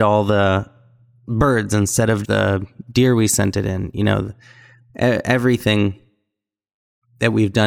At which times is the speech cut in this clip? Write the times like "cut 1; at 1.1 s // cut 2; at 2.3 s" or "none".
cut 1; at 2.2 s